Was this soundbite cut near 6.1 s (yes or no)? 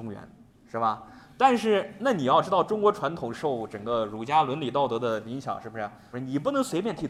yes